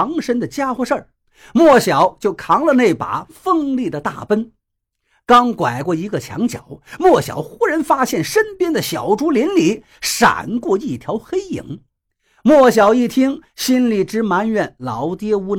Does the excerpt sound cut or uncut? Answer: cut